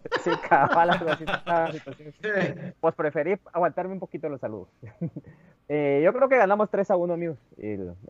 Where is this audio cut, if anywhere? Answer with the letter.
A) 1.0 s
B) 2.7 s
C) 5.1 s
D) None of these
B